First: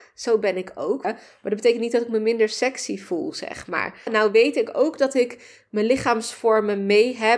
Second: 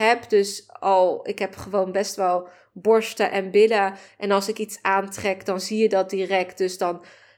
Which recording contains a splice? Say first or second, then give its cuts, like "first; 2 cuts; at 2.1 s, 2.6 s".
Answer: first; 2 cuts; at 1.0 s, 4.1 s